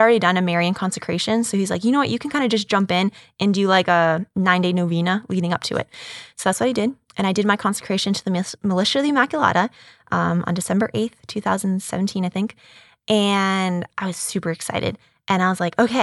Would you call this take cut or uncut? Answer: uncut